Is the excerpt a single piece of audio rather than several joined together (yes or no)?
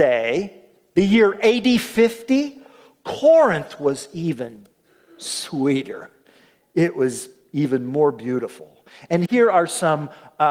yes